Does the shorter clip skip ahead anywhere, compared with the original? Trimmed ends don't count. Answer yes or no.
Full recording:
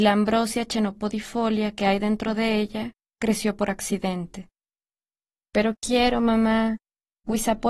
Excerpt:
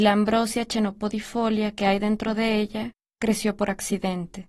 no